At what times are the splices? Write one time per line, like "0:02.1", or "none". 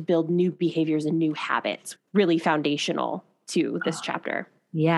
0:02.0